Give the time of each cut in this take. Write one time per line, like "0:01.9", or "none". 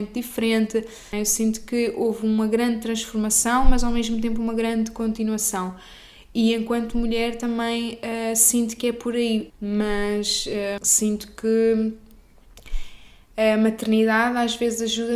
0:01.1
0:09.5
0:10.8